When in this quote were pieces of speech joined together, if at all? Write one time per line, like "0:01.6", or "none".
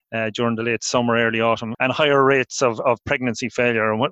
0:01.7